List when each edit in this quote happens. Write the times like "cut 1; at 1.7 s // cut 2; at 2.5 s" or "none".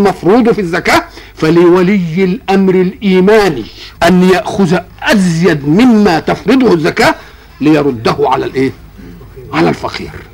cut 1; at 3.9 s